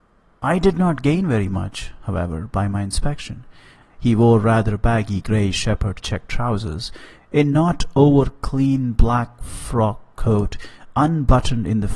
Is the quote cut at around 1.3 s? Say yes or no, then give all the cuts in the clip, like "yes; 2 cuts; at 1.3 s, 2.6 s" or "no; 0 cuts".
no; 1 cut; at 3.8 s